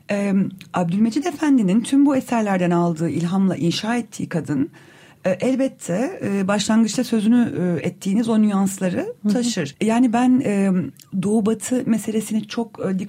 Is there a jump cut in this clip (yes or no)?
yes